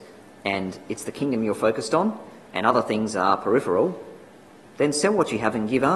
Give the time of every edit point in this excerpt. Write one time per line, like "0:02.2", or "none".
none